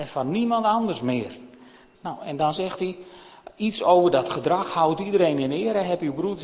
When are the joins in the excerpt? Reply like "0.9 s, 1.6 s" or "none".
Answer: 1.9 s

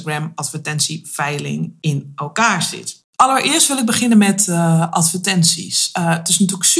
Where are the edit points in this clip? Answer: 3.1 s

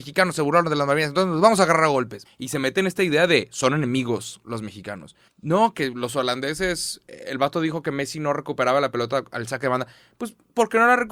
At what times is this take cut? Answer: 2.2 s, 5.3 s

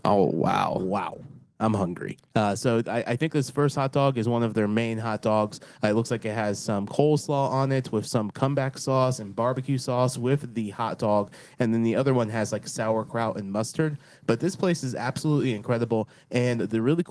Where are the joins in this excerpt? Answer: 2.2 s

